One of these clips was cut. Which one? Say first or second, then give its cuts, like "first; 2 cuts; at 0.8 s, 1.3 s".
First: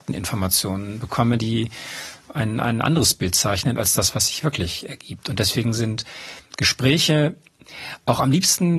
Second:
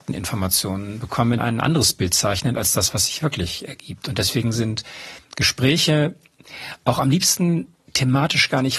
second; 1 cut; at 1.4 s